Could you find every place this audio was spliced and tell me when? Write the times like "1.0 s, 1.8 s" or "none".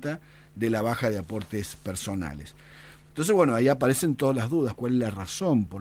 3.0 s, 4.8 s